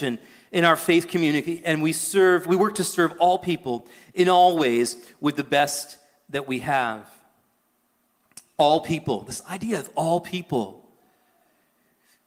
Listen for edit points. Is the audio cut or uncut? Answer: uncut